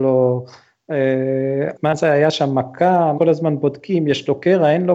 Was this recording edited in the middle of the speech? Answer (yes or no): yes